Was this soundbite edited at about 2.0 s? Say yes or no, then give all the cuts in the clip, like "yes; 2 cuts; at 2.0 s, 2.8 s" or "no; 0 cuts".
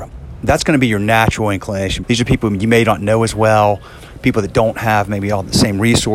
yes; 1 cut; at 2.0 s